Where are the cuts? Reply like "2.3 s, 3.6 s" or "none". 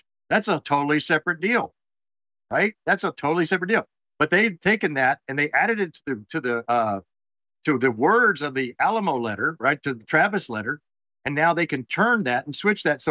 none